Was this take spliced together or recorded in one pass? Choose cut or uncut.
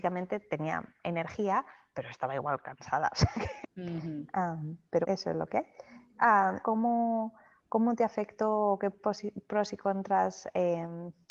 cut